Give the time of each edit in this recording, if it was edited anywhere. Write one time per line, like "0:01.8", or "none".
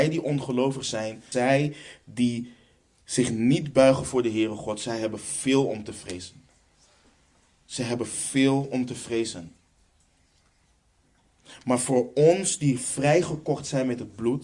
0:01.3